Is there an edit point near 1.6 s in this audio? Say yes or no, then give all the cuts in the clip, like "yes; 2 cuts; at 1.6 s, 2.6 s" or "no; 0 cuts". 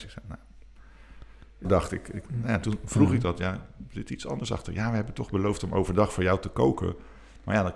yes; 1 cut; at 1.6 s